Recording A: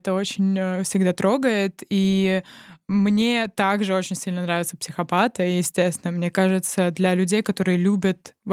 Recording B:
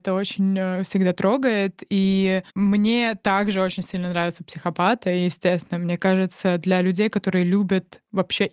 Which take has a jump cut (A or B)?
B